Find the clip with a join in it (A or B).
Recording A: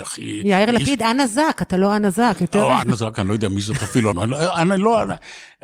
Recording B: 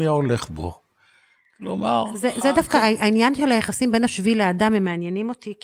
A